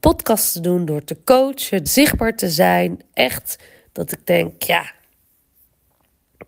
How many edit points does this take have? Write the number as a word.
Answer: one